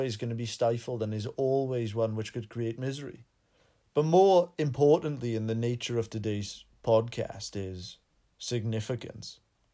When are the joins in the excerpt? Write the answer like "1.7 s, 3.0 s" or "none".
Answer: none